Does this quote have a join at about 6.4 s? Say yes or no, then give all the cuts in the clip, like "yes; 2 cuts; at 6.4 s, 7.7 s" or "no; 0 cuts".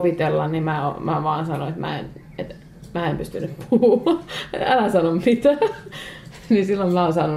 no; 0 cuts